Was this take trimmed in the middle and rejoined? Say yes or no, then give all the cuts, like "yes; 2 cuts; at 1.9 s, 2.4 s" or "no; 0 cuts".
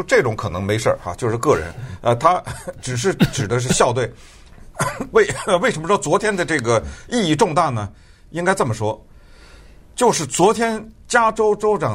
no; 0 cuts